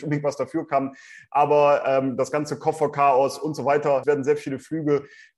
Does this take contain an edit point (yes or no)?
yes